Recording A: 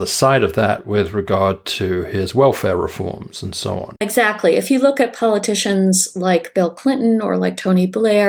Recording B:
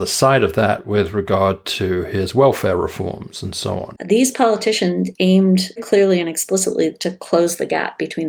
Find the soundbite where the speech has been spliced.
B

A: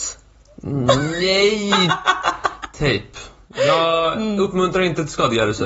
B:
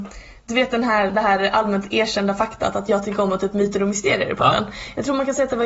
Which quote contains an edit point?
B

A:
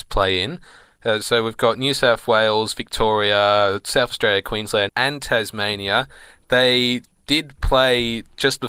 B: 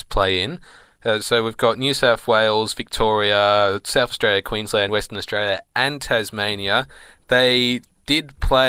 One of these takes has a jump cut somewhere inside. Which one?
A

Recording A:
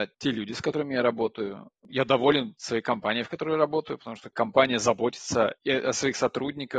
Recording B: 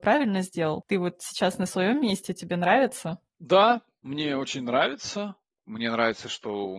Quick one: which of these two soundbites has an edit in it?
B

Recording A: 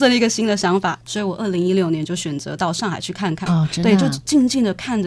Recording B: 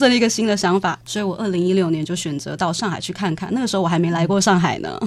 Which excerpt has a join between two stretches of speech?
A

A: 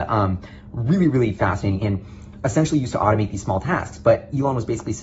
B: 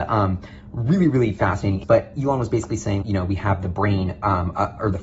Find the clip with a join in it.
B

